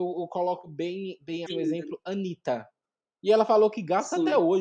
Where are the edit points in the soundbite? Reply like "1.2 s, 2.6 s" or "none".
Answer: 1.5 s, 3.1 s